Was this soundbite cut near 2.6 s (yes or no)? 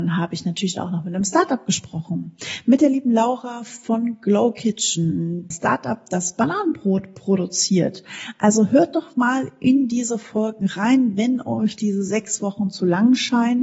no